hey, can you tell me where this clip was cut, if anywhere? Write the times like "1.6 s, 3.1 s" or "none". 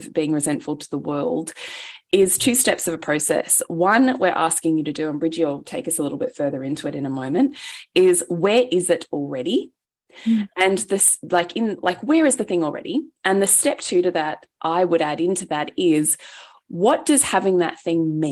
none

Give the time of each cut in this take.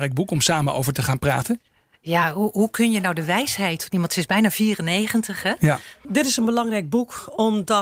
6.0 s

